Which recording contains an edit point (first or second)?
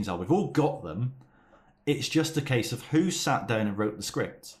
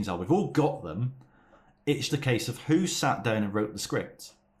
second